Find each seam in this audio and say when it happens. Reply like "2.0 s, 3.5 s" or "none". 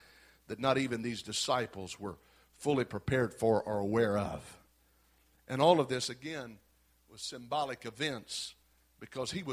none